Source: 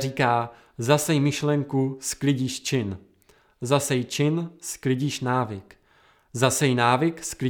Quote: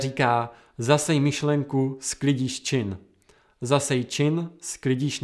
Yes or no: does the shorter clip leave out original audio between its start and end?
no